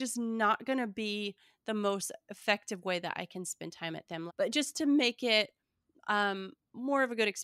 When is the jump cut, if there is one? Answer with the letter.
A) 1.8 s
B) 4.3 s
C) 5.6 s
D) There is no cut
B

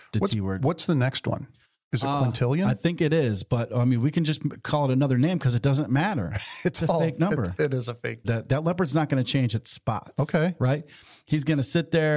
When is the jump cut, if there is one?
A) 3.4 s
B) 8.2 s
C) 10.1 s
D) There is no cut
B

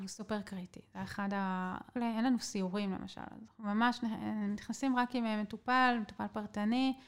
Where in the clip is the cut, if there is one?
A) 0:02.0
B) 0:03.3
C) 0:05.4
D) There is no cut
A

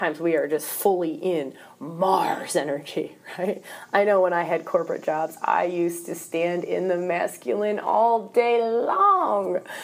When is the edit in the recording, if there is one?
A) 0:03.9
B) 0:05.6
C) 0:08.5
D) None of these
D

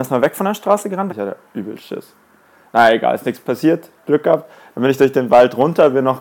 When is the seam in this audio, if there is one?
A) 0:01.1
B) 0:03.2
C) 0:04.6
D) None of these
A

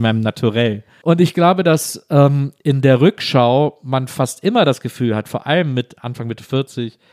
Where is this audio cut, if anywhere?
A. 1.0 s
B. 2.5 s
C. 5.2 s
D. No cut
A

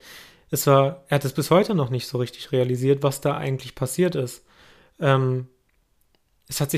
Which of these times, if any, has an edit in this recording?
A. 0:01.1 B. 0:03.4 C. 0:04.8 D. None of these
D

